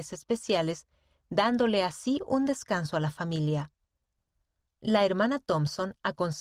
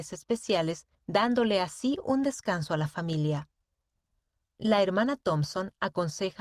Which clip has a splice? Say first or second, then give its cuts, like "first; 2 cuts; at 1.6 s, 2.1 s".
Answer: second; 1 cut; at 0.9 s